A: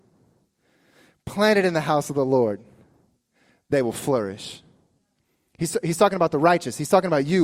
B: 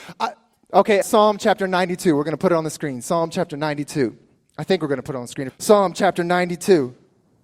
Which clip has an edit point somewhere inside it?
B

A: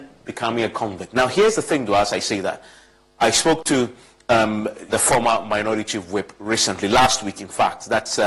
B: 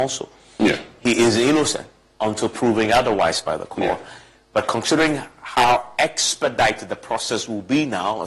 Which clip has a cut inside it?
A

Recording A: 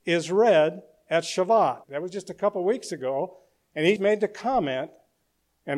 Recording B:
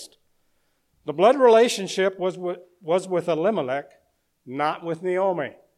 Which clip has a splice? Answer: A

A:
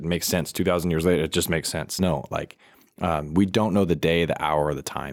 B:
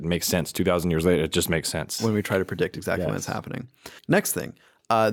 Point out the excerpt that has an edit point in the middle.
B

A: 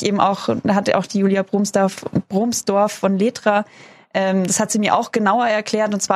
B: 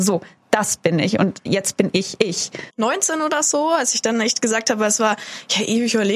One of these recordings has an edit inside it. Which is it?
B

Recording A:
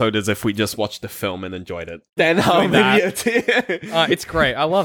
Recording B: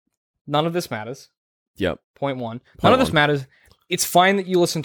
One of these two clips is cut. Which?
A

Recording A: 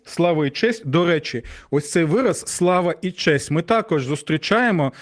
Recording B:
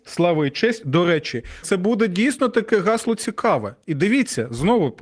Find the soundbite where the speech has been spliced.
B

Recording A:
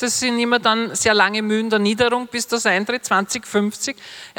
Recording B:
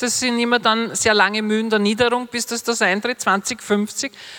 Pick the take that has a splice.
A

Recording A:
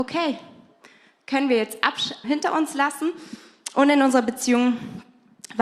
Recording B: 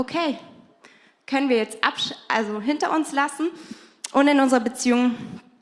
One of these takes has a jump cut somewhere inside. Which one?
A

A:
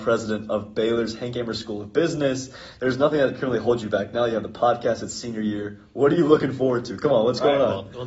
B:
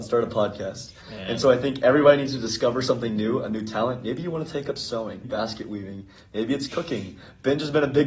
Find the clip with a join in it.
B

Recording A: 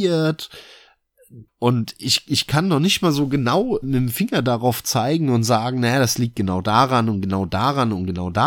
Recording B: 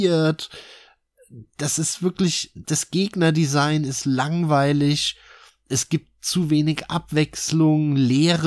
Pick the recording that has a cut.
A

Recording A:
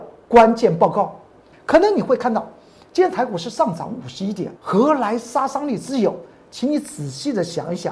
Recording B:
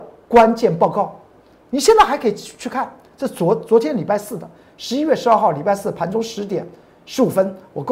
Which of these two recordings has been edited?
A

